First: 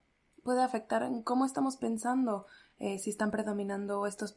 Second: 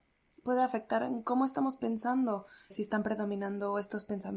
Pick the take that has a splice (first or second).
second